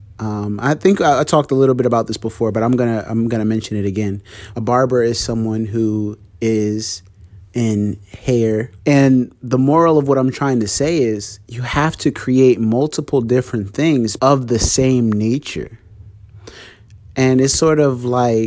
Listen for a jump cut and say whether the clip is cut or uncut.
cut